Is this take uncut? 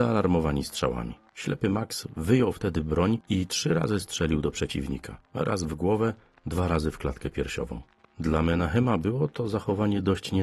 no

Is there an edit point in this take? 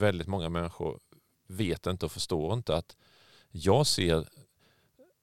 no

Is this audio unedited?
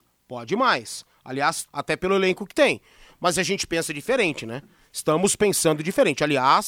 no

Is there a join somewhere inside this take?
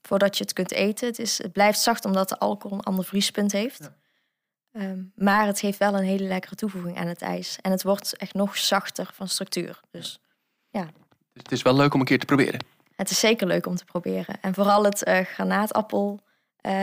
yes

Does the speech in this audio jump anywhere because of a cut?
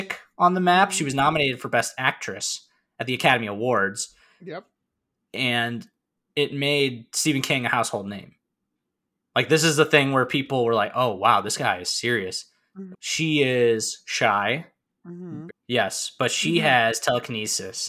yes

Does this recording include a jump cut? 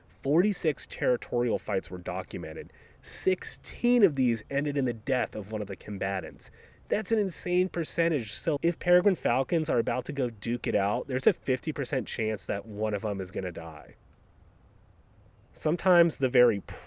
yes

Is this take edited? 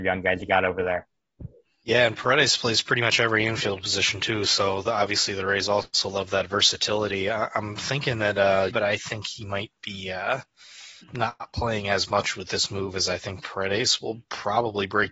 yes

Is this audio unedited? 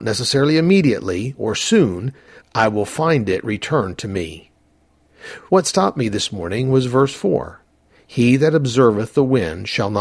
no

